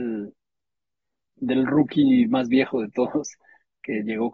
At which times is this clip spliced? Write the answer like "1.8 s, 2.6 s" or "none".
1.3 s